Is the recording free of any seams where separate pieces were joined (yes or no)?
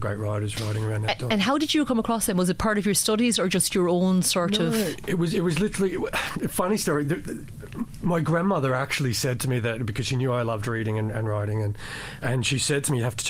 yes